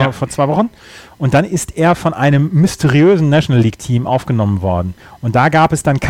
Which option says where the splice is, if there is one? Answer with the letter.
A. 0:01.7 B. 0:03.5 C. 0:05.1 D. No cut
D